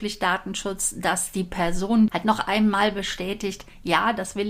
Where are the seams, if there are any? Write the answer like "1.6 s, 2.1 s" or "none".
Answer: 2.1 s